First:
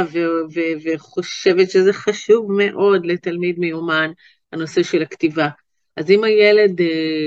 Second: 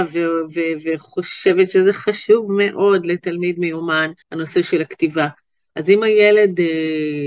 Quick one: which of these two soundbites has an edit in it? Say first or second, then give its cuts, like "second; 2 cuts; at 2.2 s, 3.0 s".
second; 1 cut; at 4.2 s